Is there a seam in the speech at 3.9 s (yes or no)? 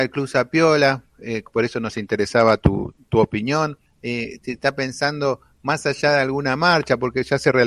yes